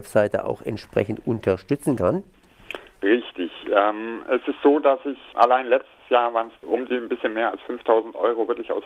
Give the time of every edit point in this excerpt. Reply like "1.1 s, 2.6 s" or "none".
5.3 s, 6.6 s